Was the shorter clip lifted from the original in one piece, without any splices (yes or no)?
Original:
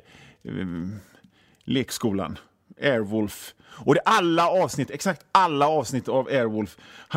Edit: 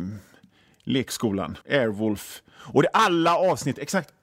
no